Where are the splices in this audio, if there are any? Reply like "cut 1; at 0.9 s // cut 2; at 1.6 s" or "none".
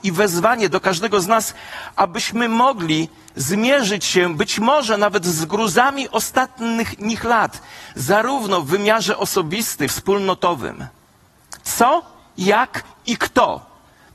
cut 1; at 9.9 s // cut 2; at 11.6 s